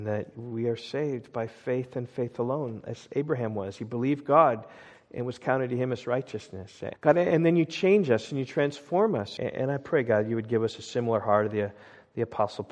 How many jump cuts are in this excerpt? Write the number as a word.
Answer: two